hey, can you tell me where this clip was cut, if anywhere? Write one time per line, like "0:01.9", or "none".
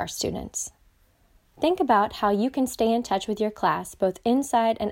0:01.5